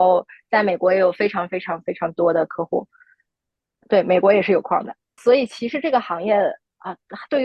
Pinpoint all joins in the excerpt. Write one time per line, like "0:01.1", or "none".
0:05.2